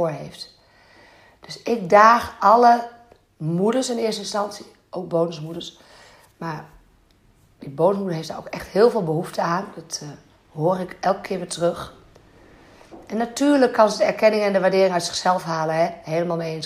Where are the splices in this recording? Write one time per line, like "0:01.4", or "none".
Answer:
none